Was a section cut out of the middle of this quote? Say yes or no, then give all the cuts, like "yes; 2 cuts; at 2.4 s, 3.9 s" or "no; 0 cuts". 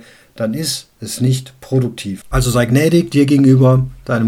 yes; 1 cut; at 2.2 s